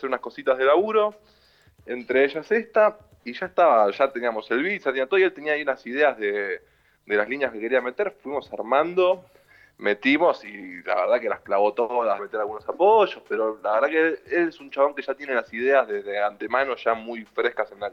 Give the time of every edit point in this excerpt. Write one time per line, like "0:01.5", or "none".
0:12.2

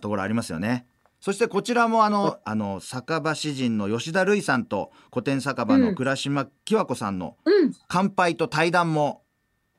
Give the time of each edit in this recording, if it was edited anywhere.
0:01.0
0:02.4

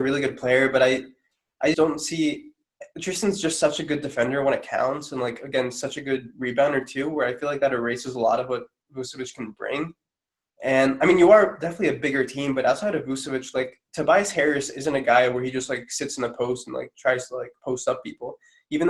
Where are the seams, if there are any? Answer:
0:01.7

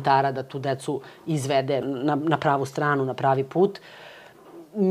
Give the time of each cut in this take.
0:01.8

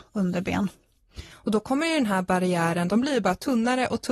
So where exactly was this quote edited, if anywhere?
0:01.3
0:02.9

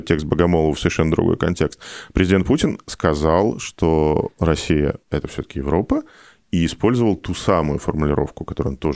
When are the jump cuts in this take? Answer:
none

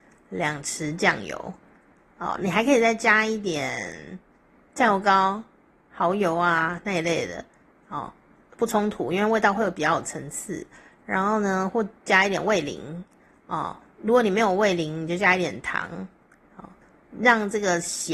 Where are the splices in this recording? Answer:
none

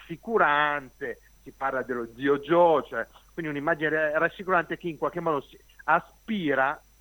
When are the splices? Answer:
none

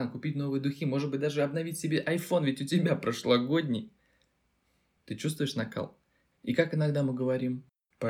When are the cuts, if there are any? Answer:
0:06.2

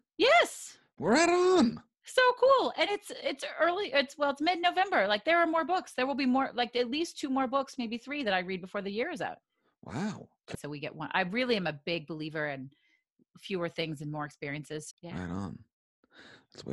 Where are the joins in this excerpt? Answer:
0:10.5
0:14.9

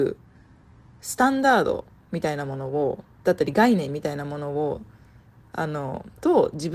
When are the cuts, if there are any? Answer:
0:03.1

